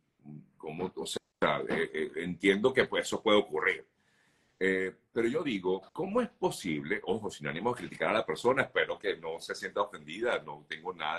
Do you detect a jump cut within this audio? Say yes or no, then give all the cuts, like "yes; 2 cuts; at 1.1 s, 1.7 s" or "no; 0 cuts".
yes; 1 cut; at 5.9 s